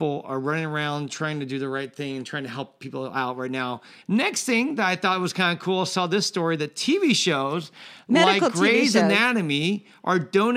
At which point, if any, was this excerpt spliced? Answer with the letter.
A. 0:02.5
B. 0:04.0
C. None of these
B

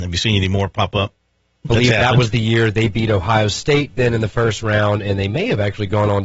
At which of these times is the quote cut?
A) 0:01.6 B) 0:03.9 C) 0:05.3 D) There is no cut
A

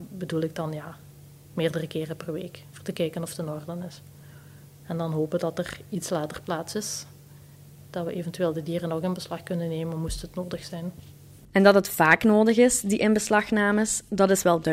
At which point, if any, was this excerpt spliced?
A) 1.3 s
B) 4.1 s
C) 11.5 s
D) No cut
D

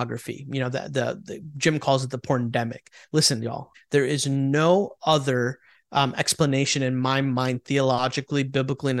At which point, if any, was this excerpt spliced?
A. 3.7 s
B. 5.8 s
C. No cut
A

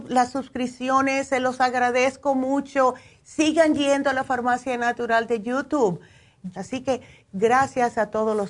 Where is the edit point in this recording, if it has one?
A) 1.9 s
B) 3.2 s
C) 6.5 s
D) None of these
C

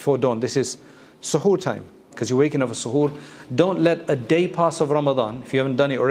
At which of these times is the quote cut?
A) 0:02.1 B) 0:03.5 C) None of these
A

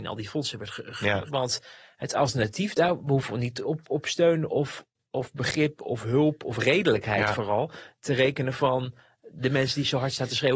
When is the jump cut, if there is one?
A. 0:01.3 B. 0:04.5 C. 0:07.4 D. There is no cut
A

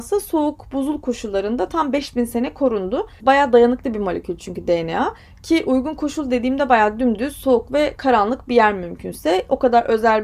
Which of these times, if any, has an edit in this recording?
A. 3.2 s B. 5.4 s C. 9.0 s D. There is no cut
A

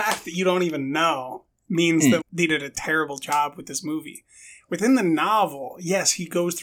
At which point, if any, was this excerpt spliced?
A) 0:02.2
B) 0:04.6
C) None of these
A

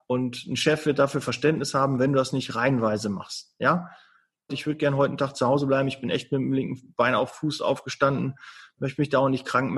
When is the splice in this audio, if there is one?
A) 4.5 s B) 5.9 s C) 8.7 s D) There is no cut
A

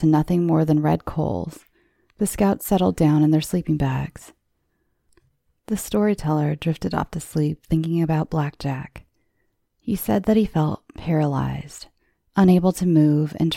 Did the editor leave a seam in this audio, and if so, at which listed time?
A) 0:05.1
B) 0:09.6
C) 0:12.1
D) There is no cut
B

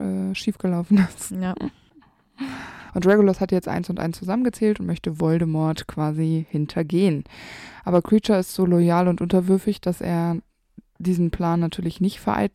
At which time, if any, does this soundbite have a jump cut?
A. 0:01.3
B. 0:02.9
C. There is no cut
B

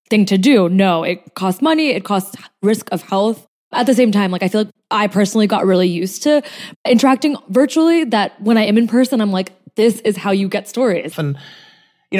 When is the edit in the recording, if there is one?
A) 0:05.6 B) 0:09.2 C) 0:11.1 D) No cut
C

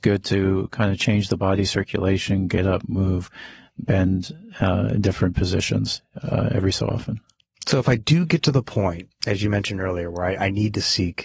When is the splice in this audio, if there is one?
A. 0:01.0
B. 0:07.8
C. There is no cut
A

